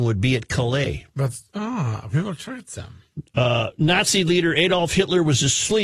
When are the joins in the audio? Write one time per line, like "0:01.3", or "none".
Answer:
none